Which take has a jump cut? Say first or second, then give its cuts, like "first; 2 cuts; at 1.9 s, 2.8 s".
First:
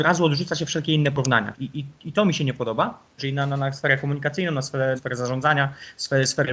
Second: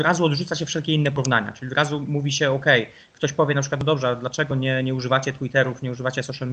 first; 3 cuts; at 1.5 s, 3.2 s, 5.0 s